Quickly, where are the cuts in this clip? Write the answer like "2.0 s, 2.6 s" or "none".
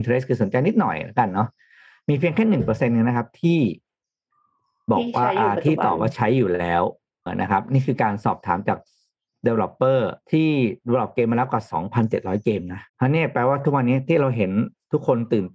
7.3 s, 10.2 s, 12.9 s